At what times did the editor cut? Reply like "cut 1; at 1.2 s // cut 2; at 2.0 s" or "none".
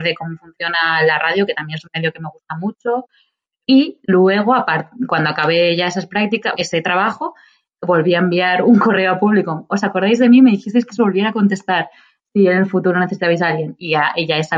cut 1; at 6.5 s

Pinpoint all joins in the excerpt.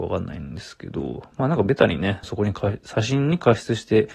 cut 1; at 2.2 s

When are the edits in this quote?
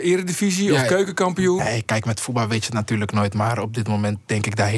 cut 1; at 1.6 s

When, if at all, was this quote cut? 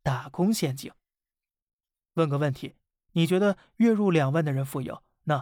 none

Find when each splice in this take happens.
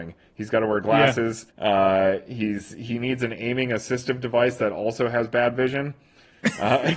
cut 1; at 1.5 s

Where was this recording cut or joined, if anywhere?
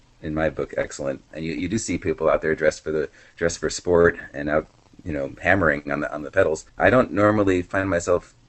cut 1; at 1.3 s // cut 2; at 6.7 s

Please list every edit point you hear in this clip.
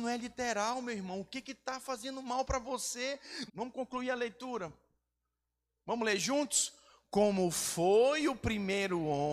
cut 1; at 3.5 s // cut 2; at 5.8 s

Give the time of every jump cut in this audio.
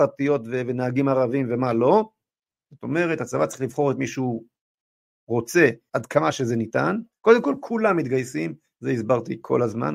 cut 1; at 2.7 s // cut 2; at 5.9 s

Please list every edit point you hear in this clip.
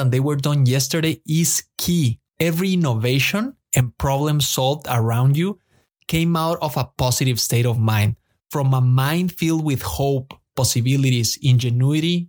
cut 1; at 2.3 s

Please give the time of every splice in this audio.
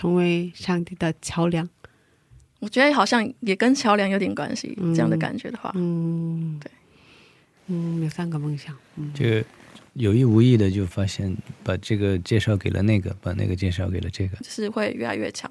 cut 1; at 14.4 s

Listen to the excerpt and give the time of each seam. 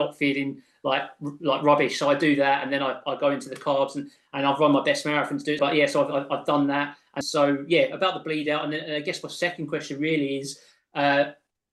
cut 1; at 5.6 s // cut 2; at 7.2 s

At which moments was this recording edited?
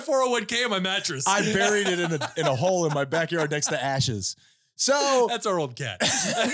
none

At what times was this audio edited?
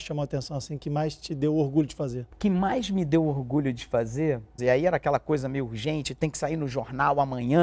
cut 1; at 2.3 s // cut 2; at 4.6 s

